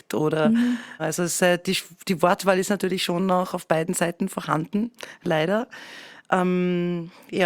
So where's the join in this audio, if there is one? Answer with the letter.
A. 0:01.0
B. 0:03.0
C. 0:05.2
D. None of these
A